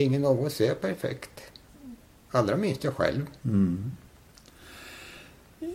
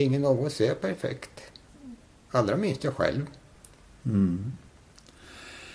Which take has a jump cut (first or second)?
first